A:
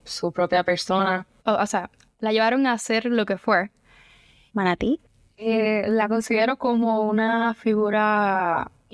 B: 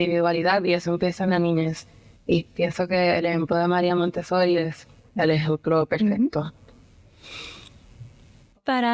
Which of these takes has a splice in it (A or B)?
A